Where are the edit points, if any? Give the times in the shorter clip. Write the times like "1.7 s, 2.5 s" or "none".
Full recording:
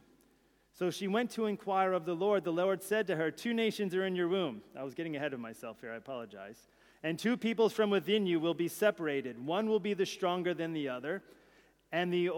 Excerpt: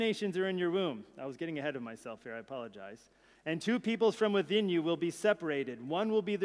none